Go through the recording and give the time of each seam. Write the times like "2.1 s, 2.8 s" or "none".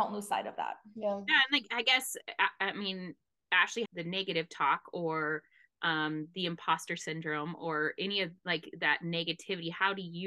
3.9 s